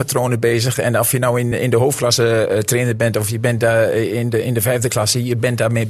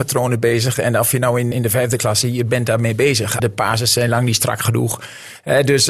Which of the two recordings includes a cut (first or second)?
second